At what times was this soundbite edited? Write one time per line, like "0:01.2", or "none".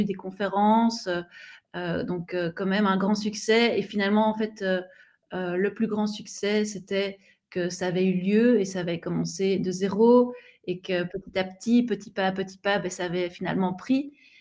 none